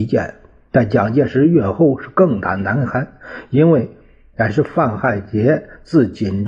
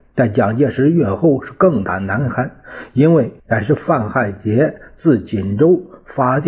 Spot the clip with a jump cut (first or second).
second